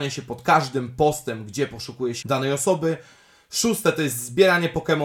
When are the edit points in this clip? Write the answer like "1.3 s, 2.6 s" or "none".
2.2 s